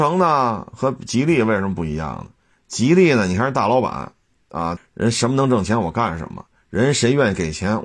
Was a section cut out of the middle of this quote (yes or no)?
yes